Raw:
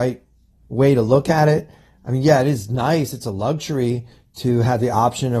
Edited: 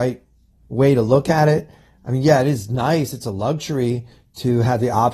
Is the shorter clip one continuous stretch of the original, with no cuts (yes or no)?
yes